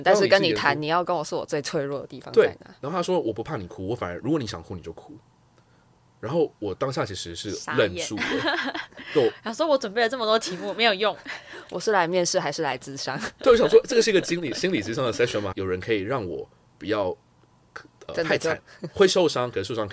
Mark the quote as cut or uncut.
cut